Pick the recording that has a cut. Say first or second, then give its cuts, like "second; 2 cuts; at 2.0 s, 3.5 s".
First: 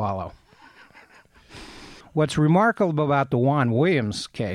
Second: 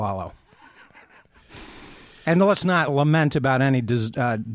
first; 1 cut; at 2.0 s